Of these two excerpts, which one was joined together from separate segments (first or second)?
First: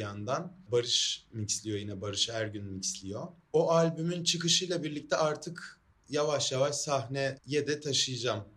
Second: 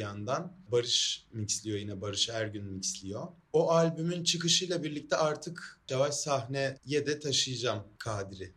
second